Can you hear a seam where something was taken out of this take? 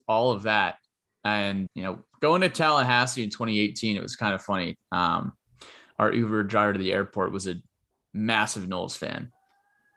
yes; 1 cut; at 1.7 s

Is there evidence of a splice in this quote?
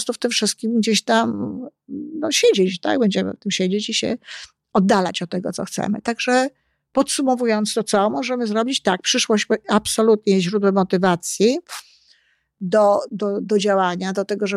yes; 1 cut; at 13.1 s

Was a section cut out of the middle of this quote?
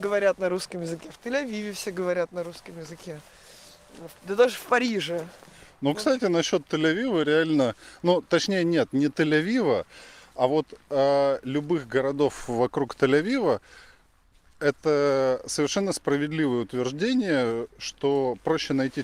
no; 0 cuts

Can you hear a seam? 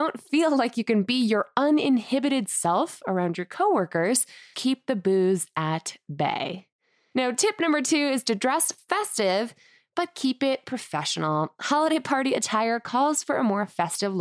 yes; 1 cut; at 4.5 s

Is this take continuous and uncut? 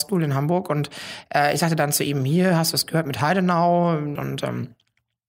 no; 1 cut; at 4.2 s

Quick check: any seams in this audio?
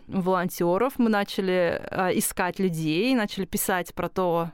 no; 0 cuts

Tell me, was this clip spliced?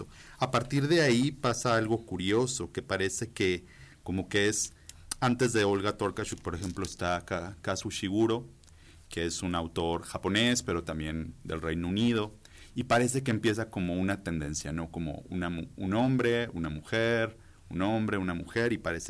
no; 0 cuts

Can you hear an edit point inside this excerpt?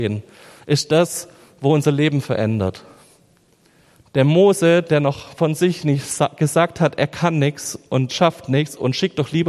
yes; 1 cut; at 8.1 s

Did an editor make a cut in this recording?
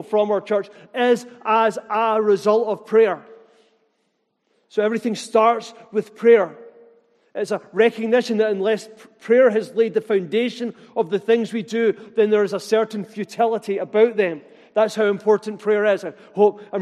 no; 0 cuts

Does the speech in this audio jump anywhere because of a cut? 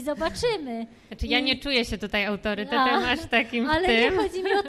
no; 0 cuts

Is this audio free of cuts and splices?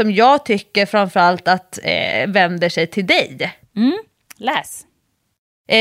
yes; 0 cuts

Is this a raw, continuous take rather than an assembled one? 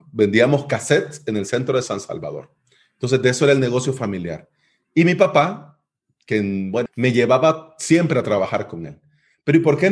no; 1 cut; at 6.9 s

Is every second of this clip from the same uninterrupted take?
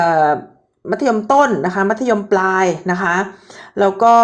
yes; 0 cuts

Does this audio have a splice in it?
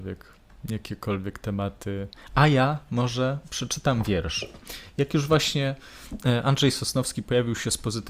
no; 0 cuts

